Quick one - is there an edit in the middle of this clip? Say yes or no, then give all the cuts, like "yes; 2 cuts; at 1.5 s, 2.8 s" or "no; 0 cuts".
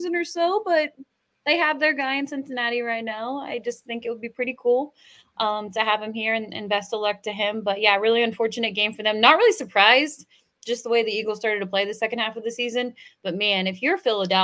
no; 0 cuts